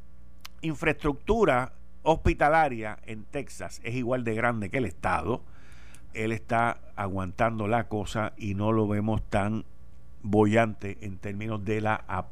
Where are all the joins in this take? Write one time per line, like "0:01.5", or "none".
0:06.1